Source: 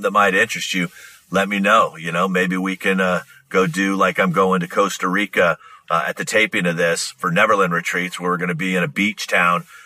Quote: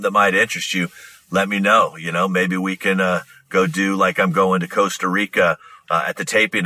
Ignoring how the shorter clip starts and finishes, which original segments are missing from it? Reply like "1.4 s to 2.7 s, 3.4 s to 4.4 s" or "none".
none